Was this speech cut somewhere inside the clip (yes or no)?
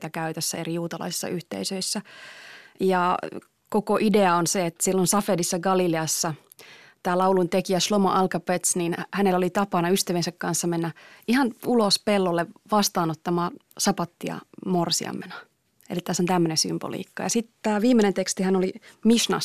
no